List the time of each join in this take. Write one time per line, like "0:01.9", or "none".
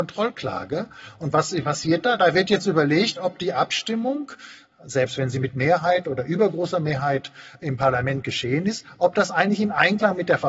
none